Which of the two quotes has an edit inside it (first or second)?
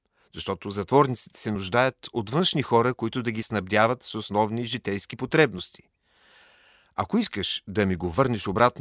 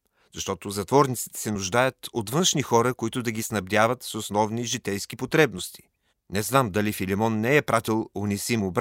second